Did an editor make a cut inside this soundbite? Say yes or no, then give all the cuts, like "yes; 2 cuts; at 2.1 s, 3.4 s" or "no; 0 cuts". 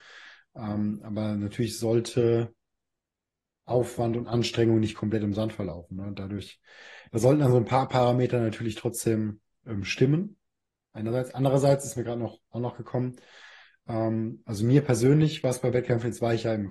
no; 0 cuts